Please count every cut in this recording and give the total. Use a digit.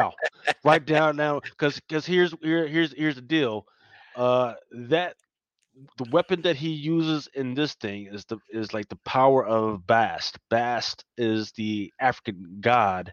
0